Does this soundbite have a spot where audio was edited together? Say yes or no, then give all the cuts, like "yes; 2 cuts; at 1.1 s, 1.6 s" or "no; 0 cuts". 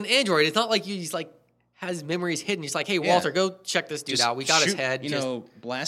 no; 0 cuts